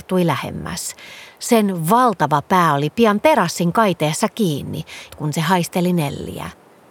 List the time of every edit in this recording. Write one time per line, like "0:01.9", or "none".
0:05.1